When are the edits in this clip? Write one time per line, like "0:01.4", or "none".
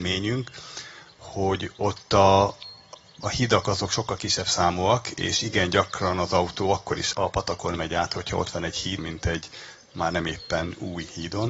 0:07.1
0:09.0

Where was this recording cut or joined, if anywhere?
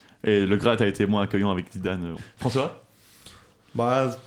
0:02.2

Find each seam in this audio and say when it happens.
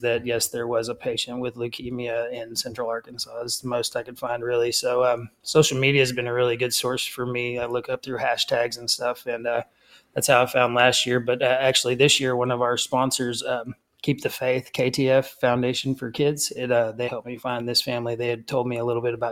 0:17.1

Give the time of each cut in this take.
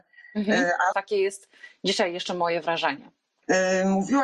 0:00.9

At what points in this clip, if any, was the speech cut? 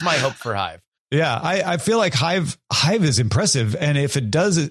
0:01.0

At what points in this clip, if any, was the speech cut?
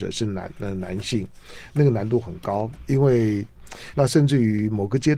0:03.9

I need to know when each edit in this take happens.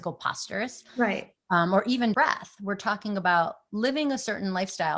0:02.1

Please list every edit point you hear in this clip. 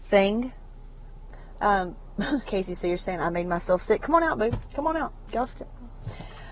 0:02.5

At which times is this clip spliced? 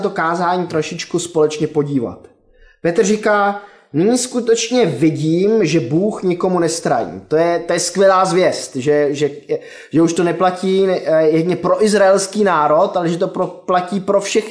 none

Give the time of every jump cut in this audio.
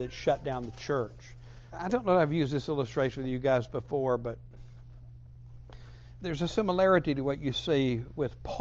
0:01.7

